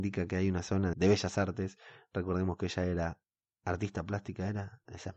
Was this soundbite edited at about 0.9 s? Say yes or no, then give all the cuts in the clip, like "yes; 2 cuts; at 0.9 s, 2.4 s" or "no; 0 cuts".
yes; 1 cut; at 0.9 s